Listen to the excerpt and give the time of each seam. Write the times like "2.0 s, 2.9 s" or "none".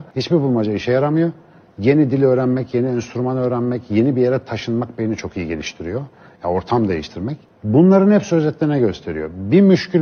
none